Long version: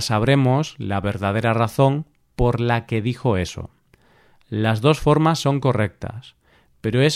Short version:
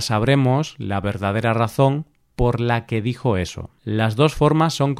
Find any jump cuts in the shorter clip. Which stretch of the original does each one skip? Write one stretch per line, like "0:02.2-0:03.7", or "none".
0:03.8-0:04.4